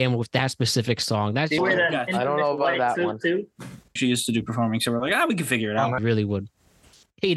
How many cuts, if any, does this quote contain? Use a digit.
3